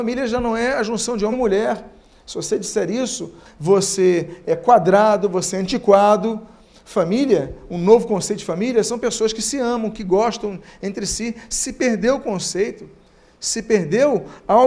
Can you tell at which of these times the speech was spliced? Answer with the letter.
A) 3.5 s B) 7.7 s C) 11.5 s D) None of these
A